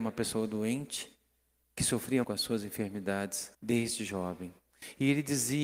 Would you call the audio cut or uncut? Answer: cut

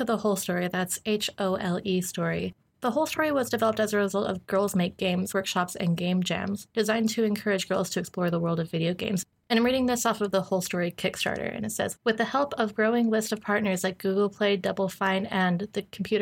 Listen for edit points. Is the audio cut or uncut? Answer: cut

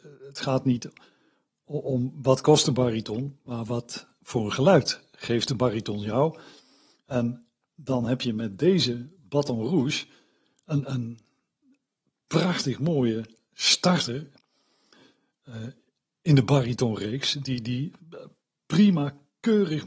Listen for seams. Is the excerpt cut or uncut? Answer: uncut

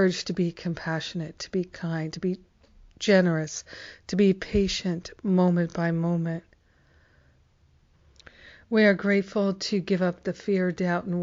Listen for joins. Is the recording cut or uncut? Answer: uncut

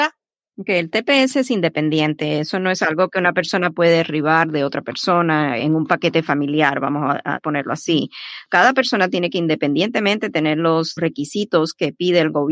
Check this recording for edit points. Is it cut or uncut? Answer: uncut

